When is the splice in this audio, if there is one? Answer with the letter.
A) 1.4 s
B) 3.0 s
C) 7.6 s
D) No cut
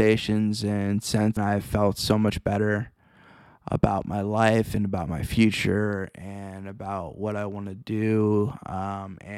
A